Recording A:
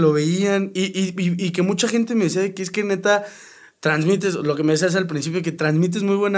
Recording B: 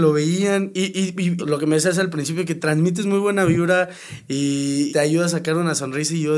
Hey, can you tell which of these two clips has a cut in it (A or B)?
B